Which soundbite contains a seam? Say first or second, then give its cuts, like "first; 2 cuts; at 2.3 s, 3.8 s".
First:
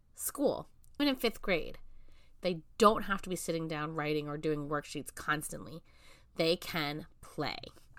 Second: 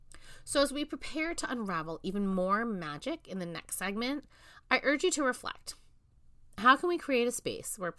first; 2 cuts; at 1.0 s, 2.4 s